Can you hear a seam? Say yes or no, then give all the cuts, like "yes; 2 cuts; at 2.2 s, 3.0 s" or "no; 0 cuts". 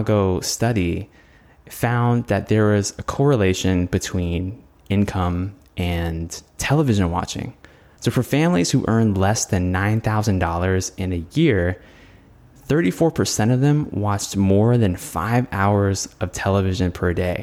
no; 0 cuts